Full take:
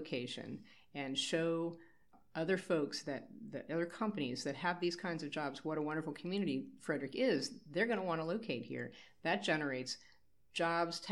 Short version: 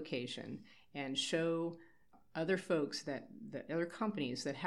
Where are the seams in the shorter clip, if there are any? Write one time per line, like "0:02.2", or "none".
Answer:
none